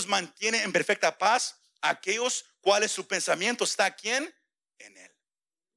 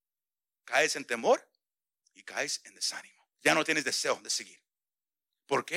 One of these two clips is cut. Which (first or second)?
second